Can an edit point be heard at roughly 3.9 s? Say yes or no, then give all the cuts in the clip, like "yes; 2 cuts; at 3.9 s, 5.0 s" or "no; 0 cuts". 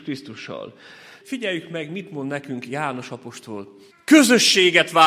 yes; 2 cuts; at 1.2 s, 3.9 s